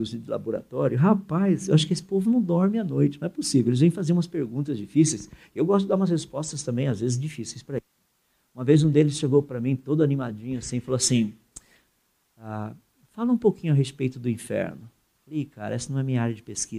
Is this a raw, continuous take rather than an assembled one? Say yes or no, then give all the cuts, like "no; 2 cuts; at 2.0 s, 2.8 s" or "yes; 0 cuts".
yes; 0 cuts